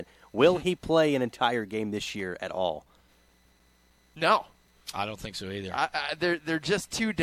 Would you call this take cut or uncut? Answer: uncut